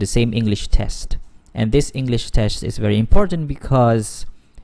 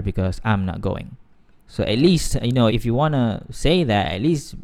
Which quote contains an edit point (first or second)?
second